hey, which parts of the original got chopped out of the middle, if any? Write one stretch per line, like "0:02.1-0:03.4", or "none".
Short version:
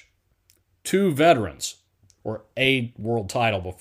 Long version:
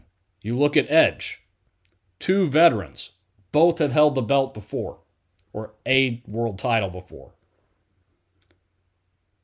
0:03.4-0:05.4

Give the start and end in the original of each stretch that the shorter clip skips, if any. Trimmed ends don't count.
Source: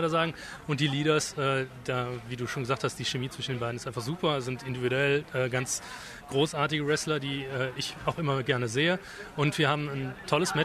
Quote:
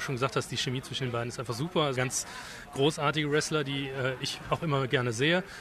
0:04.4-0:05.5

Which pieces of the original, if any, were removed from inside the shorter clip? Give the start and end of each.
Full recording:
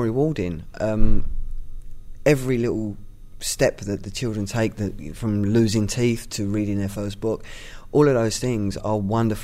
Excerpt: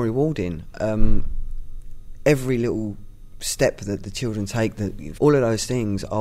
0:05.2-0:07.9

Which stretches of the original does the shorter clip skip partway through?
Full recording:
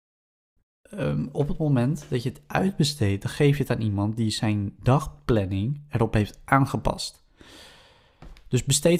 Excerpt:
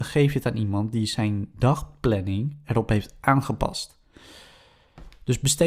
none

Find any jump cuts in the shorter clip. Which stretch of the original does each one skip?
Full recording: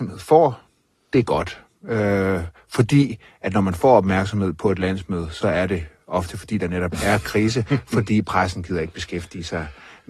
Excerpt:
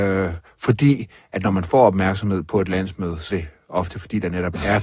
0:05.4-0:05.7

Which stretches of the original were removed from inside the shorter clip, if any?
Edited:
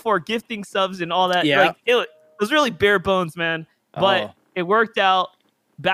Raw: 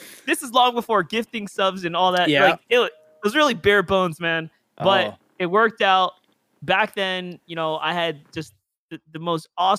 none

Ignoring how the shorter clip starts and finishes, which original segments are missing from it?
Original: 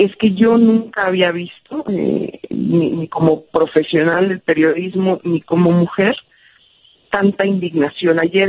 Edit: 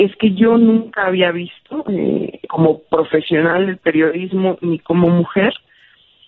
0:02.5-0:03.1

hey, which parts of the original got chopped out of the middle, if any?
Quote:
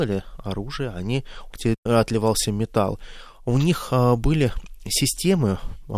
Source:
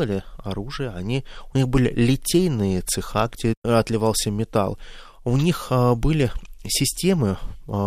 0:01.5-0:03.3

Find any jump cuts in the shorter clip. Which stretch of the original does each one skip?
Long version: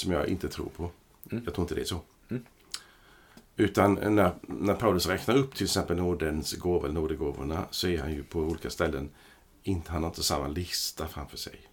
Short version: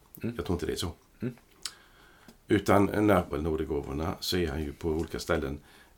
0:04.4-0:06.8

